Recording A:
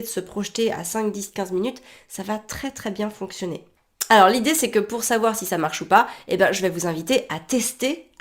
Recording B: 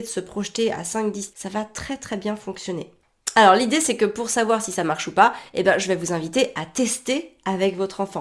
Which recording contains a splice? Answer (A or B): B